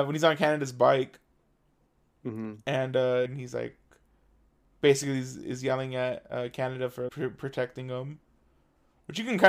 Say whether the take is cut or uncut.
cut